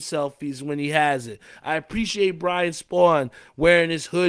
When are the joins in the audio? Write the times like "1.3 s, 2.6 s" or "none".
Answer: none